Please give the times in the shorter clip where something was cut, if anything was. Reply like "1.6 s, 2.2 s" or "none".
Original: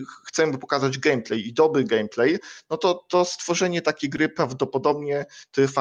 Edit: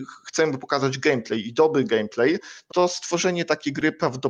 2.7 s